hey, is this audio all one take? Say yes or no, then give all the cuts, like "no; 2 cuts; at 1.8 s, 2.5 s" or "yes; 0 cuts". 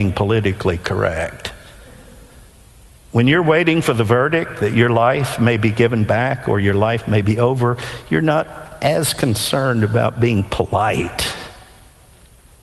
yes; 0 cuts